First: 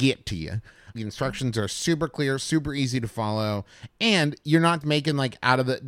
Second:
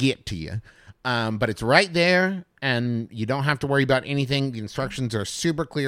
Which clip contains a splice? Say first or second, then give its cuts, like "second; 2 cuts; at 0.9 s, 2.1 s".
first; 2 cuts; at 0.9 s, 4.8 s